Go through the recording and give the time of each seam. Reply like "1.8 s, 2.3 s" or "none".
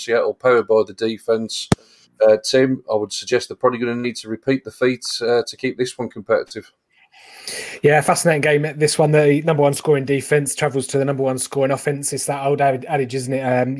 none